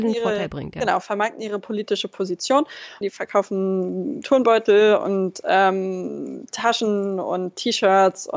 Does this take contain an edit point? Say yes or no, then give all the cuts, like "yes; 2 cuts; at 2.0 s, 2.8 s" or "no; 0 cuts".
yes; 1 cut; at 3.0 s